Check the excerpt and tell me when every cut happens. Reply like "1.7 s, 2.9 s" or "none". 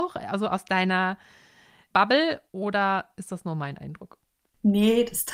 none